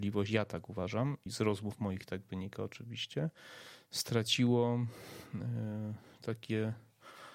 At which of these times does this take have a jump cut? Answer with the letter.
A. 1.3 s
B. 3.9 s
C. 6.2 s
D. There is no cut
A